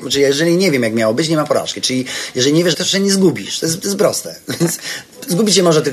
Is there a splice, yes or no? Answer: yes